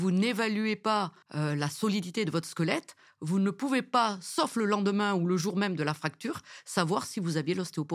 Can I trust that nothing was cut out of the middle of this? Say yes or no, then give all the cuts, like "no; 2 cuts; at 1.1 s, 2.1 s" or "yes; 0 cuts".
no; 1 cut; at 1.2 s